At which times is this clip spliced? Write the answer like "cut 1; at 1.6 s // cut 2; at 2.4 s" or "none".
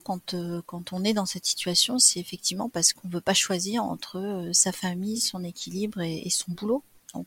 none